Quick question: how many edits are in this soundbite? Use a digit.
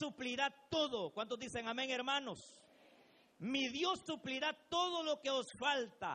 1